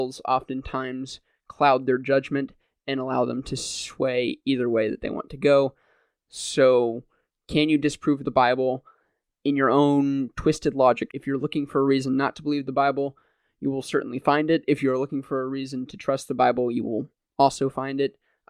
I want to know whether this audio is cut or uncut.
cut